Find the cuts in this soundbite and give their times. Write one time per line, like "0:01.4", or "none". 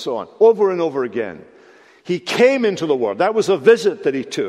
none